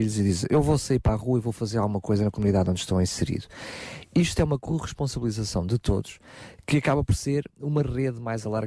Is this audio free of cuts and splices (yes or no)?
yes